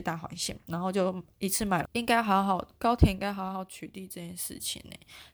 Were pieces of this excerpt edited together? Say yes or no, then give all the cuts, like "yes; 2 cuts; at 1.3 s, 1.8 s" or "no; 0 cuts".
yes; 1 cut; at 1.8 s